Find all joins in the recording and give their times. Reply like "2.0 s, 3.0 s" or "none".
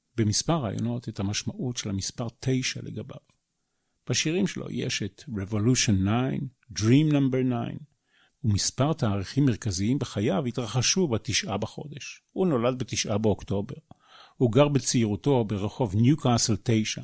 none